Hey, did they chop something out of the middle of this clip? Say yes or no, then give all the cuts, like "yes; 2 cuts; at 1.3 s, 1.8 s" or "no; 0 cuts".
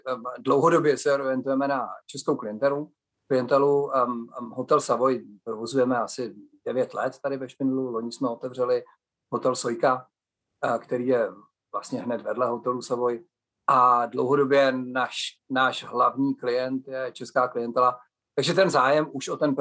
no; 0 cuts